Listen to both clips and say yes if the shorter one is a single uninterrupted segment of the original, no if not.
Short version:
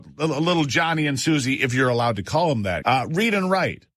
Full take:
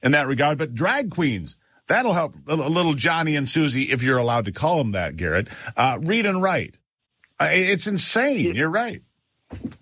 no